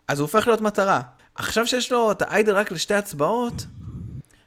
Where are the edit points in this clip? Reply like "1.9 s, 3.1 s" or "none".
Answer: none